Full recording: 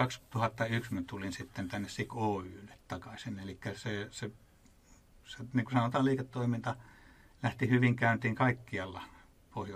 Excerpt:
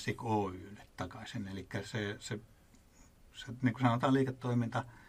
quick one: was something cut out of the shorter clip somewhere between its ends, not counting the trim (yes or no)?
no